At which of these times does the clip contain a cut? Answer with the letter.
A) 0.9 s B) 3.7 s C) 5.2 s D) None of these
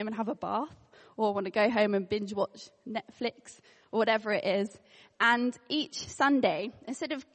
D